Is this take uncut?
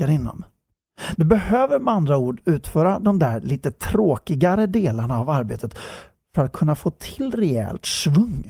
no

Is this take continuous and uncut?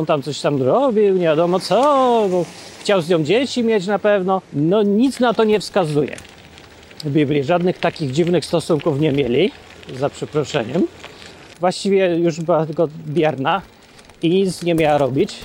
no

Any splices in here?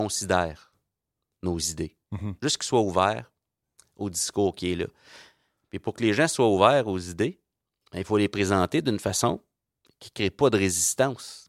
no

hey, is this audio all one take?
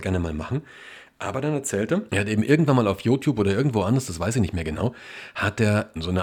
yes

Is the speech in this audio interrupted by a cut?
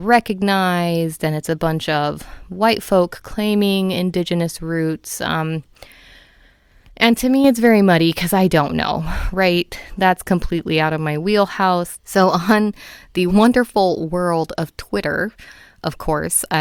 yes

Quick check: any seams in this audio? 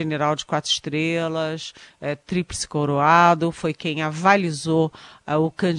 no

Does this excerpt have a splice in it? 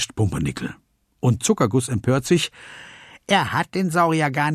no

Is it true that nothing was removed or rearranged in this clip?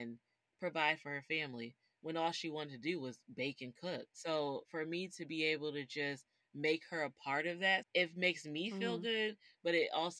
no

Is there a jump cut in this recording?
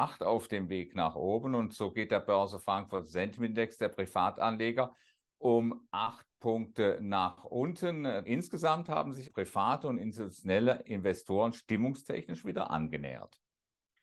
yes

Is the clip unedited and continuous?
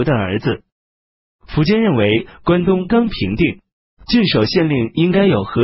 no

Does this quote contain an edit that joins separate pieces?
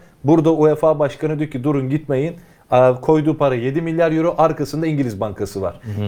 no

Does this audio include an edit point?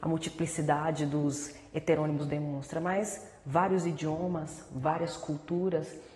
no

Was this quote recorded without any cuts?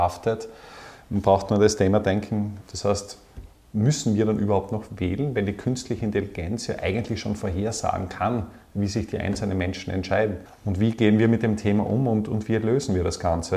no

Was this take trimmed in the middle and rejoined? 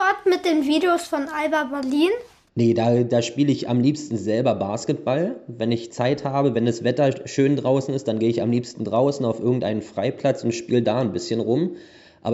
no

